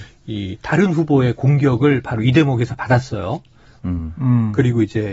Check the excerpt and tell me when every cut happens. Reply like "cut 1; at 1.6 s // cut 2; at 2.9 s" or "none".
cut 1; at 3.8 s